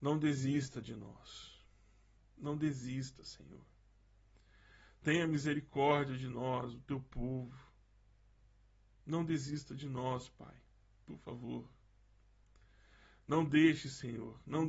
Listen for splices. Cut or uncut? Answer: cut